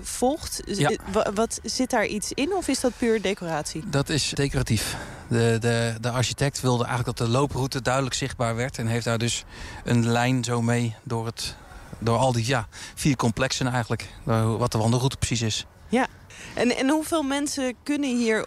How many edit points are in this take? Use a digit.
1